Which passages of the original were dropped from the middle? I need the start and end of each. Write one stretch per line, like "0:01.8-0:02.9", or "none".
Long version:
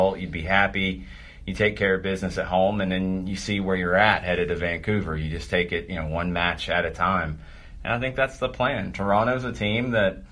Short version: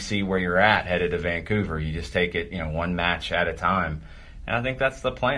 none